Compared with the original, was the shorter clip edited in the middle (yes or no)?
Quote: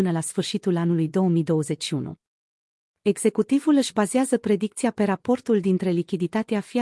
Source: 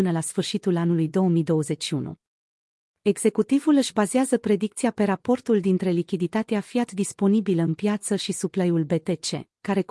no